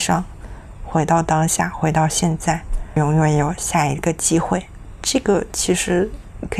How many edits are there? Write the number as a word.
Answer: zero